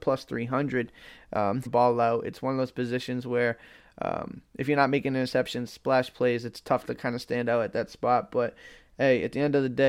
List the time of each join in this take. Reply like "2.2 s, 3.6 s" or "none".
1.7 s

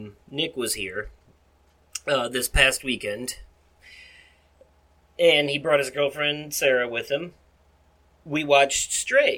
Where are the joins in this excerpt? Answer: none

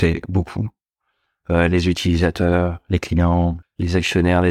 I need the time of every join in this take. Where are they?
3.6 s

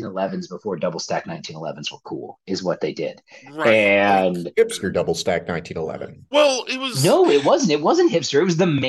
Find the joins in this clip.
none

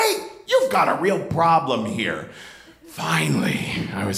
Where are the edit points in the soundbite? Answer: none

